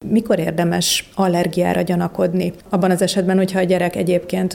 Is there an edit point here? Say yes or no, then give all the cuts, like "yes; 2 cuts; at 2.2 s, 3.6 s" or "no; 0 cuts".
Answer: no; 0 cuts